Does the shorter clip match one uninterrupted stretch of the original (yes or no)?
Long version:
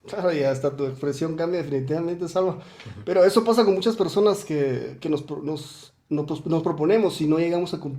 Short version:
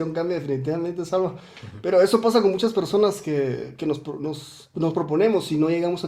no